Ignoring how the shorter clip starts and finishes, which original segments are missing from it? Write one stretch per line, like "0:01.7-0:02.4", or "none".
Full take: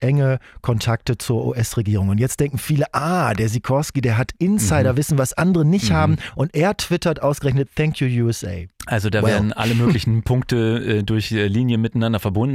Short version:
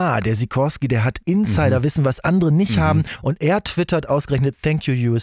none